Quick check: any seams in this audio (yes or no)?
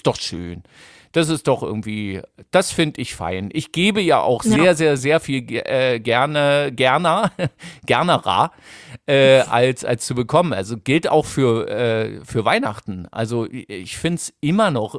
no